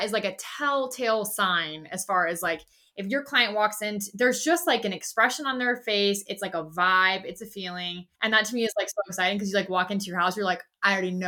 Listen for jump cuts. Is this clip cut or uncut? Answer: cut